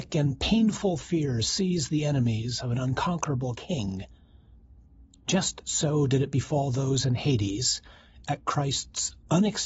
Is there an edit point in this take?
no; 0 cuts

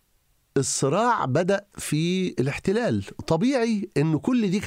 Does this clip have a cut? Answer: no; 0 cuts

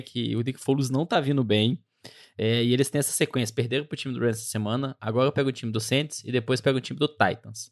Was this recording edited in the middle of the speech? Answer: no; 0 cuts

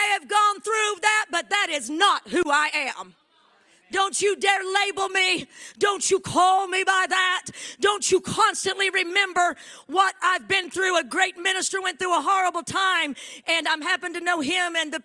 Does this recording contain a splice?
no; 0 cuts

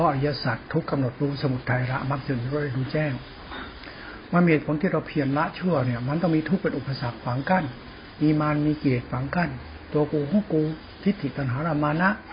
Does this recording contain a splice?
no; 0 cuts

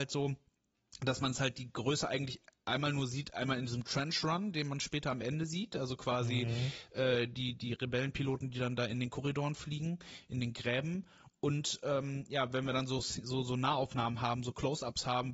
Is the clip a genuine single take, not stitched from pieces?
yes; 0 cuts

